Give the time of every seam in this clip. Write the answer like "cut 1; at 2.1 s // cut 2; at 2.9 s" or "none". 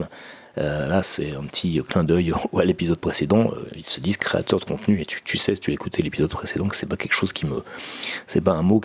none